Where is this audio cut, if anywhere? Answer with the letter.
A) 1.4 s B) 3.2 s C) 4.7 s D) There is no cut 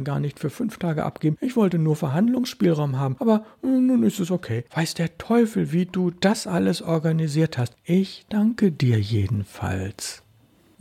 D